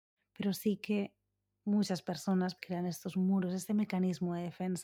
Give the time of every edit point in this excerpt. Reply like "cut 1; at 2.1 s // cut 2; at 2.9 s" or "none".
cut 1; at 2.6 s